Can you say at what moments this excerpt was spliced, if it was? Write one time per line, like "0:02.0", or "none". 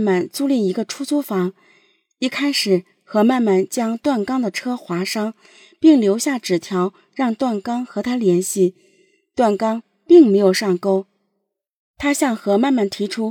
0:11.8